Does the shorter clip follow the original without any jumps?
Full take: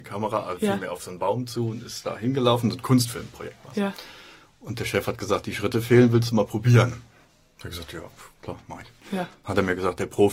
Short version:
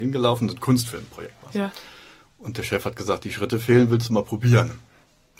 yes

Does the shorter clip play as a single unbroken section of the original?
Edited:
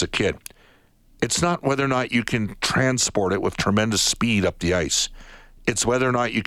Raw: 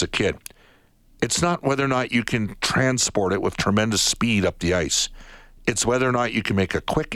yes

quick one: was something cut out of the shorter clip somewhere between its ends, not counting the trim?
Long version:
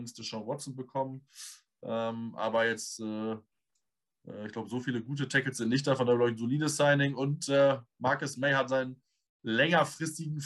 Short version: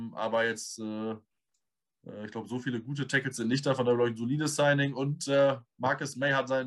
no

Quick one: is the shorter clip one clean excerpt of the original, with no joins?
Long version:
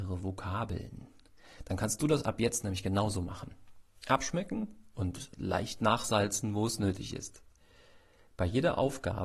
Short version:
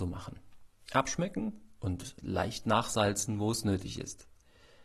yes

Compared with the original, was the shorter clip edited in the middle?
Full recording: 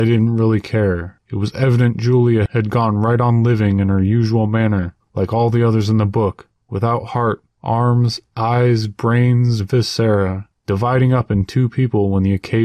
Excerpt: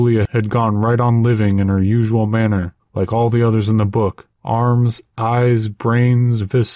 yes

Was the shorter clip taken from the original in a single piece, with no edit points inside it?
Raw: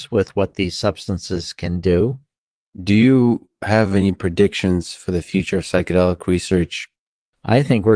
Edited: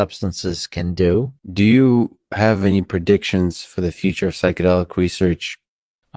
no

